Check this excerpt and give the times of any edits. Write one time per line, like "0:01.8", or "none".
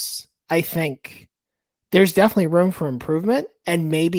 none